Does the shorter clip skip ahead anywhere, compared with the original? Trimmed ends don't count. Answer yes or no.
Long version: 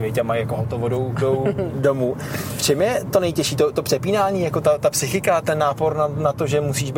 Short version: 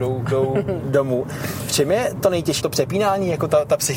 yes